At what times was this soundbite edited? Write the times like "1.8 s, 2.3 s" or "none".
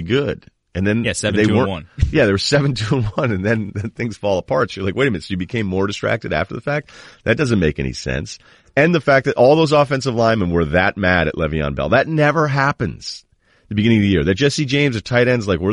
none